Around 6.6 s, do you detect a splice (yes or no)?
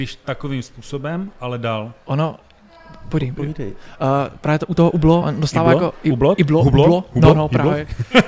no